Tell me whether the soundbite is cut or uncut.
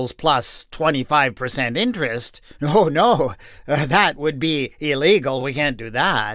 uncut